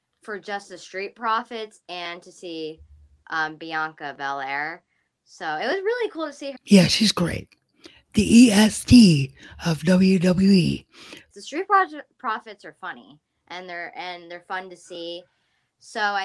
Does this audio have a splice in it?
yes; 2 cuts; at 6.6 s, 11.3 s

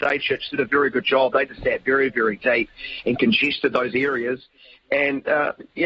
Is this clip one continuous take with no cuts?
yes; 0 cuts

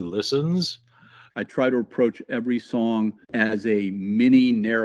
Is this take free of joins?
no; 2 cuts; at 1.3 s, 3.2 s

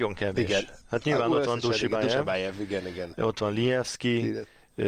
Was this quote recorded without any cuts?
yes; 0 cuts

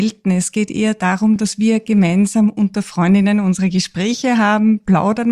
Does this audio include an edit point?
no; 0 cuts

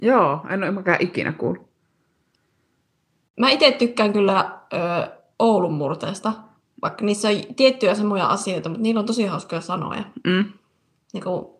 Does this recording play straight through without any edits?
yes; 0 cuts

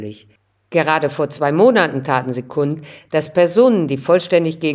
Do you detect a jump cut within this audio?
no; 0 cuts

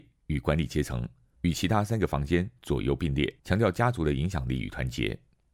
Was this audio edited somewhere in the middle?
yes; 2 cuts; at 1.4 s, 3.4 s

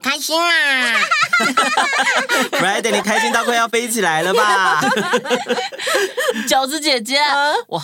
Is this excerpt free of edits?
yes; 0 cuts

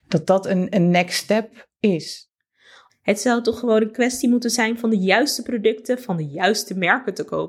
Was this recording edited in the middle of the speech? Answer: yes; 1 cut; at 2.9 s

